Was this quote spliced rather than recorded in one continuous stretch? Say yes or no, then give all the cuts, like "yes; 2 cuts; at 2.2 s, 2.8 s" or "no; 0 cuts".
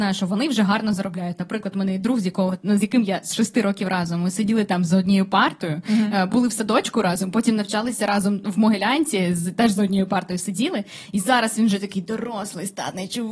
no; 0 cuts